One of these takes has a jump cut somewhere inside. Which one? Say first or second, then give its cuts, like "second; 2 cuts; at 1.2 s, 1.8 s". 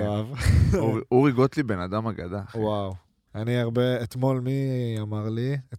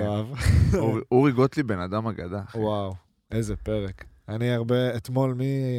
first; 1 cut; at 3.3 s